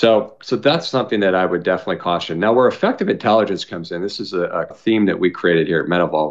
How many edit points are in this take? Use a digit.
1